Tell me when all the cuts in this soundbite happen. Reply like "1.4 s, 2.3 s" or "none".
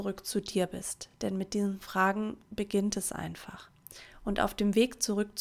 none